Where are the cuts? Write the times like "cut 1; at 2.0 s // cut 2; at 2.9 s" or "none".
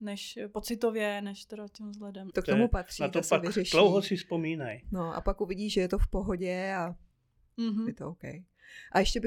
cut 1; at 2.3 s